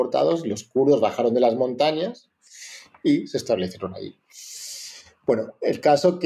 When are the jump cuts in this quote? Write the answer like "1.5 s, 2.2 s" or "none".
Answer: none